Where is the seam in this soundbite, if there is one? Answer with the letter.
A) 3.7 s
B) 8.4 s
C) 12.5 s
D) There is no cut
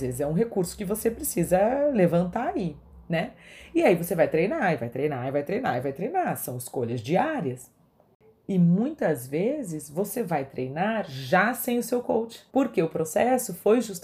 C